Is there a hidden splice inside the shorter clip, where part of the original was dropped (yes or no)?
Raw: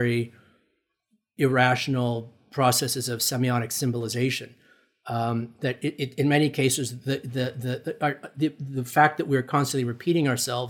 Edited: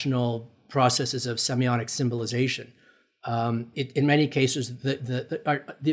yes